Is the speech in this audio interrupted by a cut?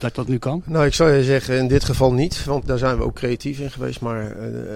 yes; 1 cut; at 2.6 s

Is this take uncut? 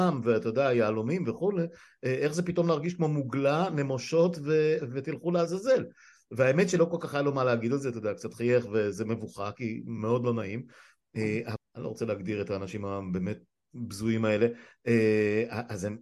no; 1 cut; at 11.6 s

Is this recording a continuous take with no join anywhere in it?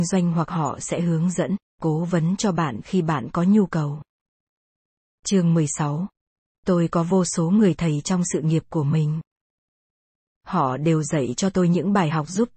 no; 1 cut; at 6.5 s

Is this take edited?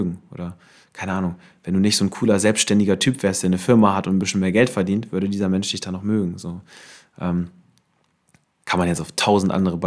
no; 0 cuts

